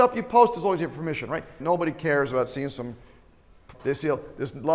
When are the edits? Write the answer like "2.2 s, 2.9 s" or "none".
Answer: 1.6 s, 3.7 s

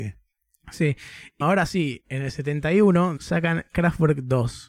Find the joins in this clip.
1.4 s, 3.2 s

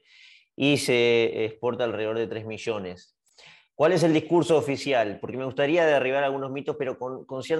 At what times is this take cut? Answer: none

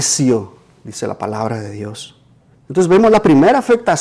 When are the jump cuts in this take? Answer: 2.5 s

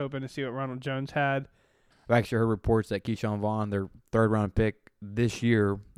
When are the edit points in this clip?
1.9 s

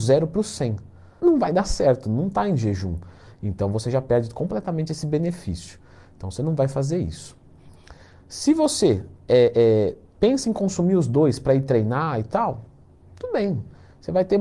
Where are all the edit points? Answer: 1.2 s

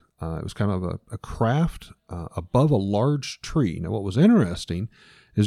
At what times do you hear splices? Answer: none

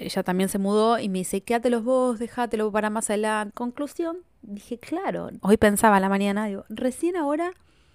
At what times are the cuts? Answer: 3.5 s, 5.4 s

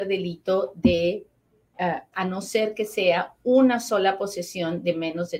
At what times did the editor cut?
2.1 s

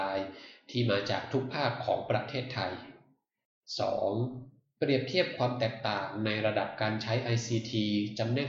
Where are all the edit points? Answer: 4.8 s

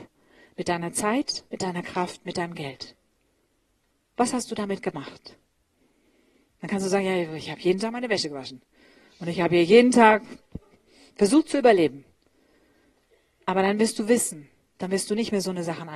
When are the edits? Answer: none

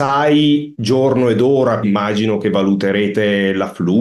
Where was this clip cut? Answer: 1.8 s

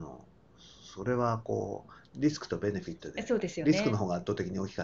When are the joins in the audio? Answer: none

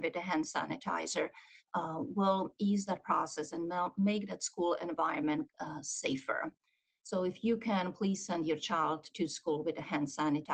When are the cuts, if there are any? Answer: none

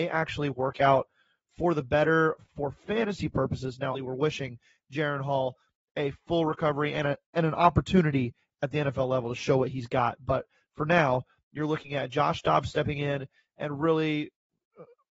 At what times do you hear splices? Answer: 3.9 s

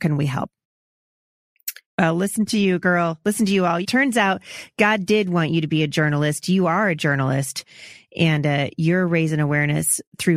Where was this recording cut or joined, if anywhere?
1.8 s, 3.8 s

